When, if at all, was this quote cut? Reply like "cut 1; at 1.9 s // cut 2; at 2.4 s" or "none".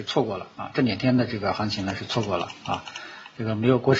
none